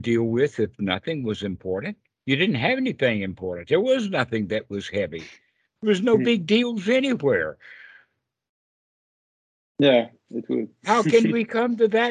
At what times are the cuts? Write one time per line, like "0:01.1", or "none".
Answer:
none